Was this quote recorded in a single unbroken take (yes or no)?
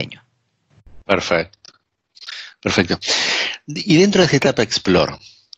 yes